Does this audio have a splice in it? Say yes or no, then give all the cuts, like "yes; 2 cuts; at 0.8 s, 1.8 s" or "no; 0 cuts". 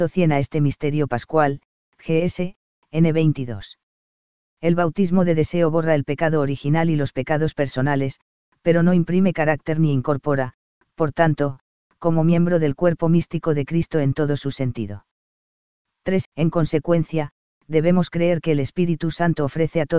yes; 1 cut; at 16.2 s